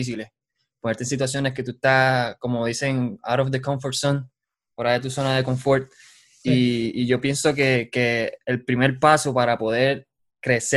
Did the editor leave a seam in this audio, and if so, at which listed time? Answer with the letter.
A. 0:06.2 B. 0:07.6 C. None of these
C